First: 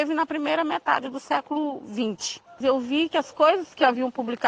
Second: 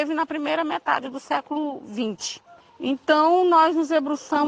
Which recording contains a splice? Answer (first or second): first